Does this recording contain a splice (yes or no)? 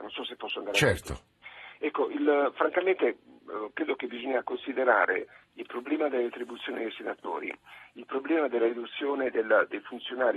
no